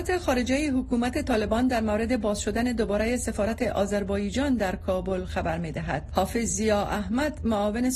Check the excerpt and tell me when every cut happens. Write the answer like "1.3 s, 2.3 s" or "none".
none